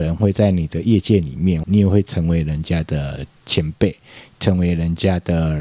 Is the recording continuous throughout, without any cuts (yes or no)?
no